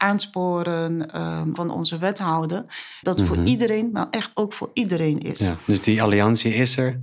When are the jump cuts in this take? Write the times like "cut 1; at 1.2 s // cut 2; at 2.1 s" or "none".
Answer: cut 1; at 1.6 s // cut 2; at 3.0 s